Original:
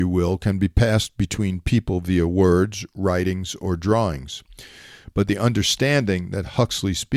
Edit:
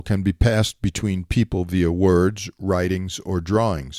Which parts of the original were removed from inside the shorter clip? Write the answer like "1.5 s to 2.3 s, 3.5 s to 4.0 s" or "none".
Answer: none